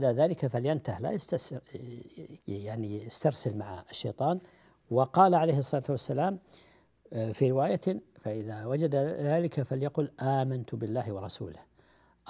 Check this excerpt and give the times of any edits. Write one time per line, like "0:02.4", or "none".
0:02.4